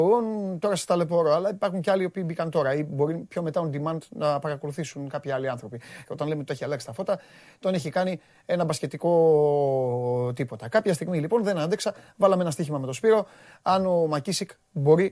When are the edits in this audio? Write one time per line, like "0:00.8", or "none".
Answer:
0:06.0